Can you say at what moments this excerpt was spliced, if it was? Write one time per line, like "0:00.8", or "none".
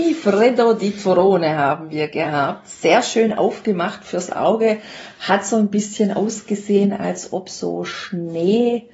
none